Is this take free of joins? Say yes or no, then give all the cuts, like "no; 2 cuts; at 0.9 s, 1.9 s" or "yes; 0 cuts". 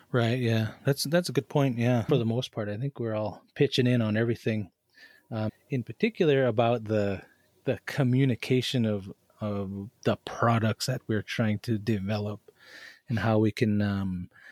no; 2 cuts; at 2.1 s, 5.5 s